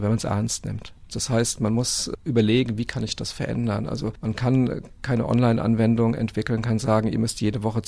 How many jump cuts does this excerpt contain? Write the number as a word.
one